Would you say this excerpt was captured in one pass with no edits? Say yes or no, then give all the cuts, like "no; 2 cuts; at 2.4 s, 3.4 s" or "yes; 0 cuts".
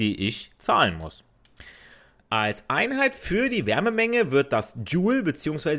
no; 1 cut; at 2.2 s